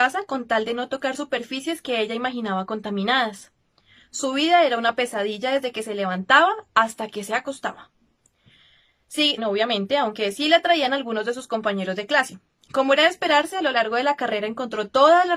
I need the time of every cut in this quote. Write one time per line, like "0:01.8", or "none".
0:09.4
0:12.7